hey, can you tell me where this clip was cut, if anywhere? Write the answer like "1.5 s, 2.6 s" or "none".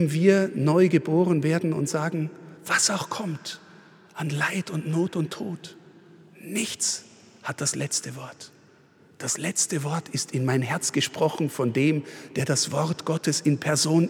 2.6 s